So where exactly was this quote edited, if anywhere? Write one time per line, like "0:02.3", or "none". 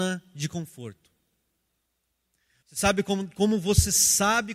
0:02.6